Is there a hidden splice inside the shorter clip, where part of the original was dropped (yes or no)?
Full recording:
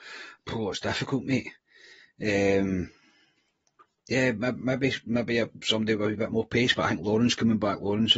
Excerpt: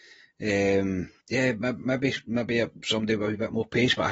yes